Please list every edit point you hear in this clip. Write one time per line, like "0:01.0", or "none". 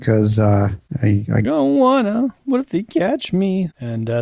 0:01.4